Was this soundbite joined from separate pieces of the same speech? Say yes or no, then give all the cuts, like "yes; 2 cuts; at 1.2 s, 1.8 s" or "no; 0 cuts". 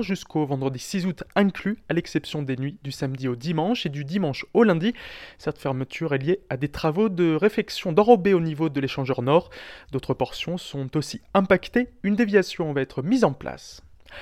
no; 0 cuts